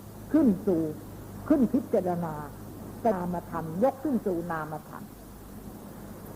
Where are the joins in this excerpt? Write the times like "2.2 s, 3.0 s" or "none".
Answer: 3.1 s